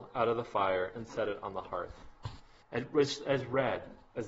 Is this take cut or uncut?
cut